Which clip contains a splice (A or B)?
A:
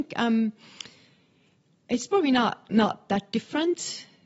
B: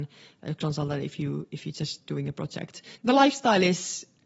B